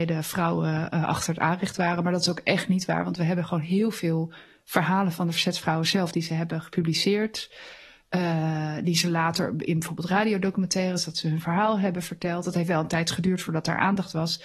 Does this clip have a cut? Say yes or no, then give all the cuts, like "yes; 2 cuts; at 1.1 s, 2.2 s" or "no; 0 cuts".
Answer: no; 0 cuts